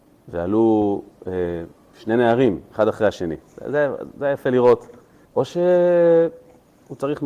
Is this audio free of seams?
no; 1 cut; at 5.2 s

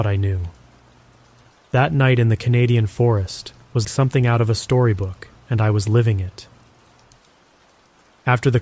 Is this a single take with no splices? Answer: no; 2 cuts; at 3.8 s, 5.3 s

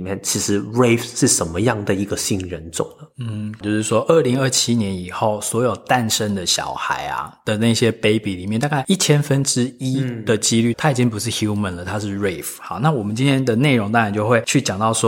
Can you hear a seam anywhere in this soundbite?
yes; 2 cuts; at 3.6 s, 10.7 s

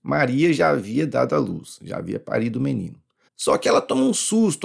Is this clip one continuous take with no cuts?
no; 1 cut; at 3.3 s

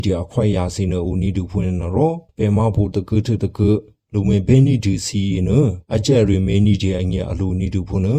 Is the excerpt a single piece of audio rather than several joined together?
no; 1 cut; at 2.3 s

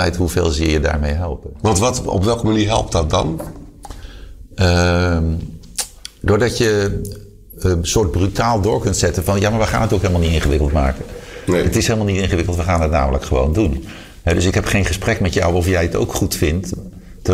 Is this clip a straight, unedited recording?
yes; 0 cuts

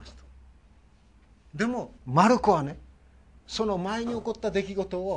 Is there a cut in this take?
yes; 1 cut; at 2.0 s

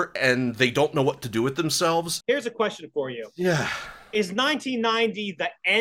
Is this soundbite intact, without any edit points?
no; 1 cut; at 2.2 s

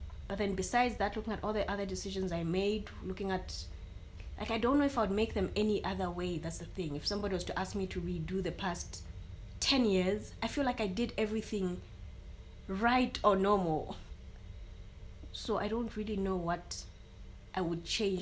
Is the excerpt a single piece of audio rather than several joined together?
yes; 0 cuts

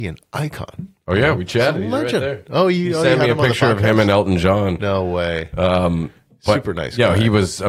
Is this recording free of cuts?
yes; 0 cuts

